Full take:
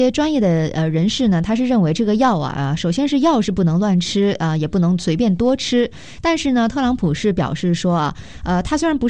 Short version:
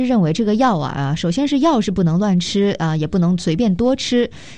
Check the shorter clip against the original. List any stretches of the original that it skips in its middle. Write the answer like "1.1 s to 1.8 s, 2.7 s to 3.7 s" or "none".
none